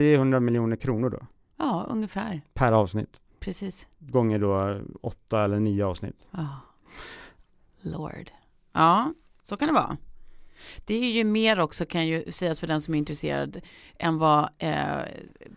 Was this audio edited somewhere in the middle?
no; 0 cuts

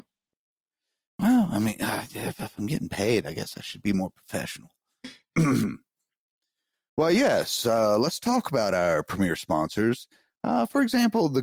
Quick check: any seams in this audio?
no; 0 cuts

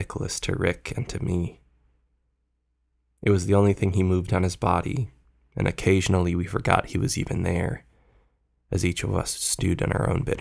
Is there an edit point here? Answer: no; 0 cuts

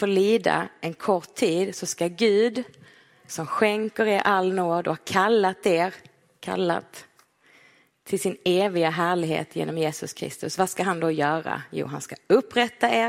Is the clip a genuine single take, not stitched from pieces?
yes; 0 cuts

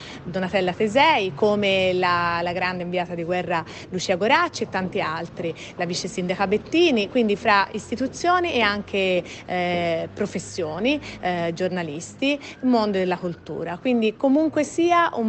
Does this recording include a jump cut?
no; 0 cuts

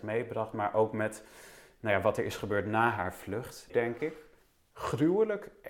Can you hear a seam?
yes; 1 cut; at 3.7 s

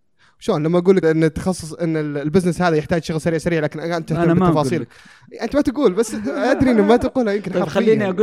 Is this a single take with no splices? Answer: no; 1 cut; at 1.0 s

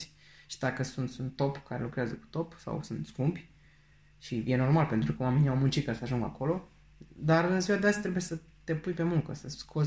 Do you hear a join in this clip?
no; 0 cuts

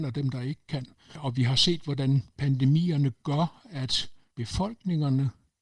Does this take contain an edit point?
no; 0 cuts

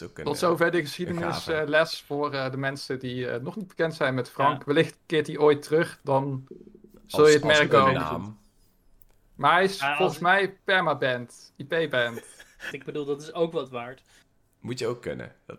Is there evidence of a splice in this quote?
yes; 1 cut; at 12.7 s

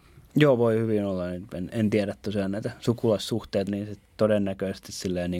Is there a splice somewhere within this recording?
yes; 2 cuts; at 1.7 s, 3.7 s

